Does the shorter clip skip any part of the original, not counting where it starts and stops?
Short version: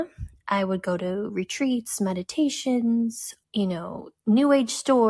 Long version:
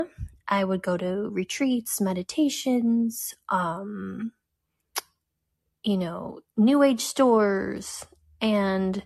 yes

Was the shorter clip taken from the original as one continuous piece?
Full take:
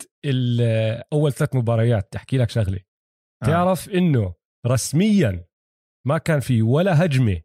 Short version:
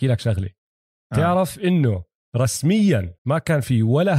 no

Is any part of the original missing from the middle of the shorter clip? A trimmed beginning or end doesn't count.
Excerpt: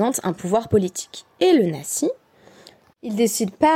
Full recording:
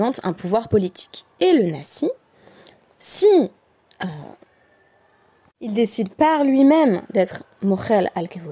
yes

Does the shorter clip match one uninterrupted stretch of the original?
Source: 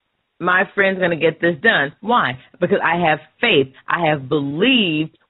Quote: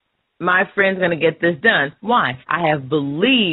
no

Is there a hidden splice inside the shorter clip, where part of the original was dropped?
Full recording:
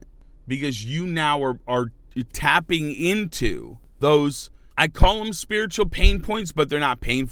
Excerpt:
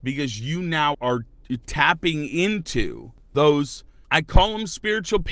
yes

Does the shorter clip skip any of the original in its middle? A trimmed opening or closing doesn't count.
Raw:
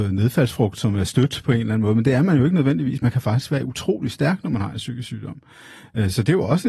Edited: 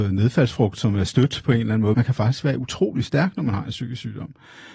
yes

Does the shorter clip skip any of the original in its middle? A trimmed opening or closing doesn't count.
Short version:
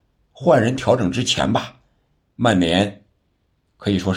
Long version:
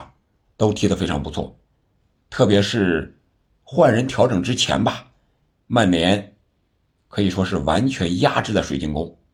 no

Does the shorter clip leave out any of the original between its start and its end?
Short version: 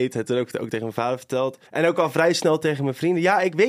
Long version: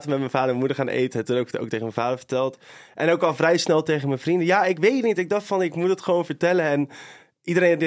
yes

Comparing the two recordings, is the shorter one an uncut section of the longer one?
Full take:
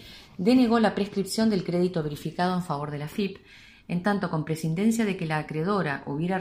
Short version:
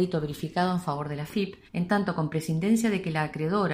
no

